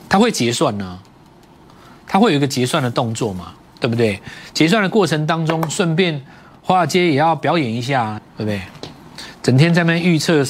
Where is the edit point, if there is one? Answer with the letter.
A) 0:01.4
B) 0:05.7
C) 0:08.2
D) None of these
C